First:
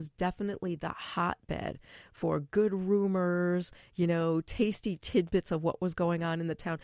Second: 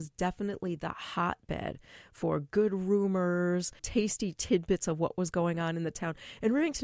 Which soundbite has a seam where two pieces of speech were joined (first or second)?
second